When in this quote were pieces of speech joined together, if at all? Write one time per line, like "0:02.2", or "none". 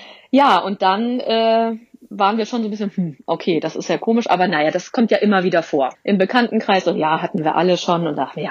0:05.9